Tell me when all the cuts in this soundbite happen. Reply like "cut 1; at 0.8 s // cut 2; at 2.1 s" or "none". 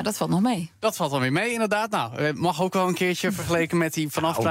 none